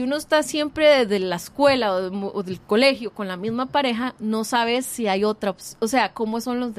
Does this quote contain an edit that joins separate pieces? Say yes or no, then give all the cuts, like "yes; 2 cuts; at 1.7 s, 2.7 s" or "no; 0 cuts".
no; 0 cuts